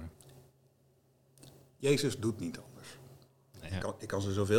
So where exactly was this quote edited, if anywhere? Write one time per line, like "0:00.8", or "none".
0:03.7